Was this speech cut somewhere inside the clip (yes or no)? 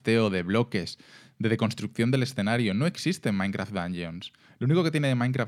no